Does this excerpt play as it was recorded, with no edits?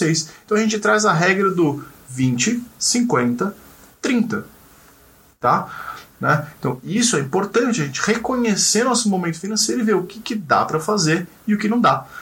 no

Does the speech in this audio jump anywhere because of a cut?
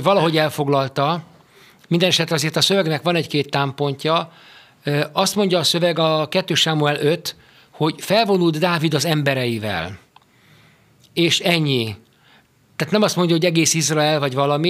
no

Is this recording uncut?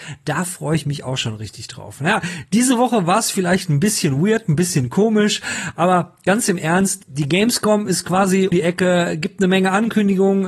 no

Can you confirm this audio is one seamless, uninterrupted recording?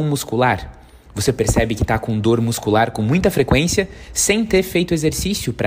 yes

